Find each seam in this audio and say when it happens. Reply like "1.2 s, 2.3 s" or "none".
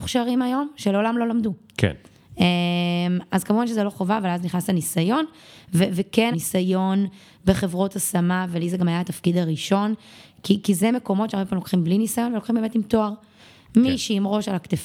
6.3 s